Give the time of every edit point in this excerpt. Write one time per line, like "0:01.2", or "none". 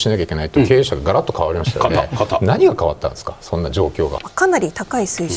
0:04.2